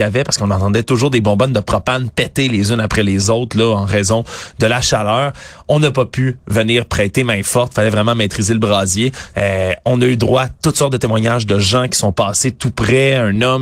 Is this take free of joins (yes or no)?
no